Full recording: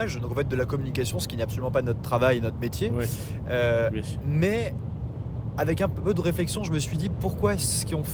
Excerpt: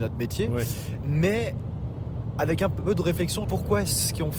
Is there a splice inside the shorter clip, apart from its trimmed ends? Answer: yes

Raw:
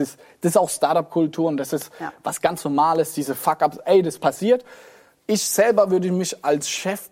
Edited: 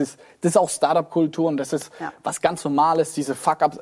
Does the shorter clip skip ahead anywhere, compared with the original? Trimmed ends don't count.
no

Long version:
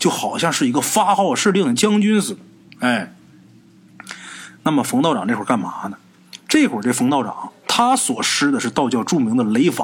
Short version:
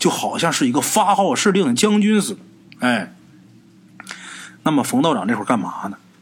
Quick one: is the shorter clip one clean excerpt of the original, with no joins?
yes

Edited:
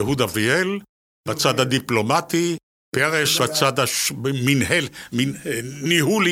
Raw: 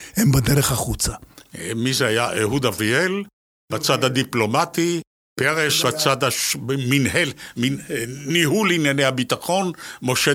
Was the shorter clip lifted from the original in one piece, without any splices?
yes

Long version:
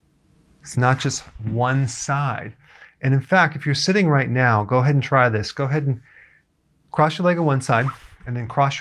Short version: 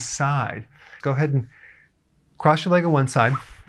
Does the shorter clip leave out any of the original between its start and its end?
yes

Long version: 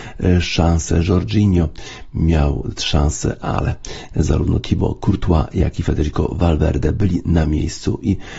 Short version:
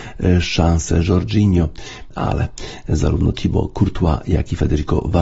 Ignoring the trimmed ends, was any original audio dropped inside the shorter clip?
yes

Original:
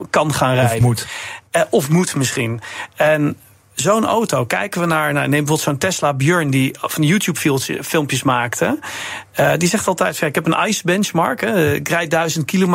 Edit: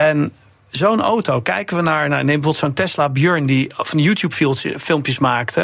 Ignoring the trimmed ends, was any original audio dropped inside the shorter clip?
no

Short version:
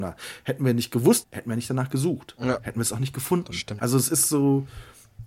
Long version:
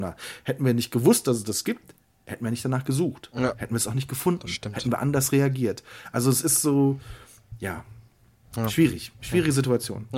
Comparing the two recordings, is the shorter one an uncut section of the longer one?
no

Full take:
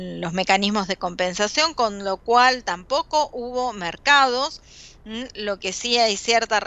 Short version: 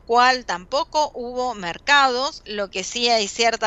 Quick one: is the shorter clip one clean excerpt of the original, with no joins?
no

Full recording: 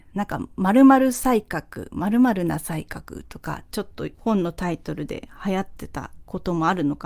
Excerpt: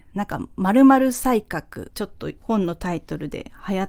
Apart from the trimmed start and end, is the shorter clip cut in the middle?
yes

